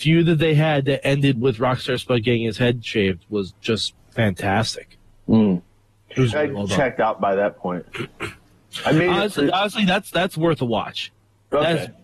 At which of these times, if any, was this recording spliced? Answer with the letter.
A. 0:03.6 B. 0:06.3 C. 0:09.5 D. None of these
B